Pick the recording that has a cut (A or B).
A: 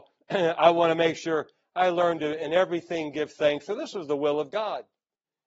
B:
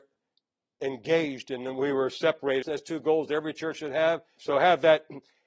B